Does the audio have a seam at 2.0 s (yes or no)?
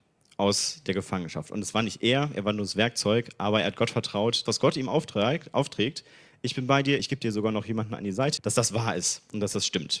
no